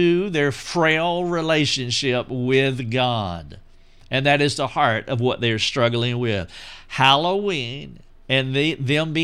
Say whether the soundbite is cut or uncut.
uncut